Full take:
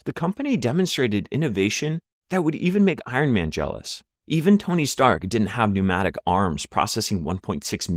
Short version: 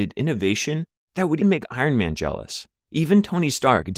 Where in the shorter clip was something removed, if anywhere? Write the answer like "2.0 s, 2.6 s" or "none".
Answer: 1.4 s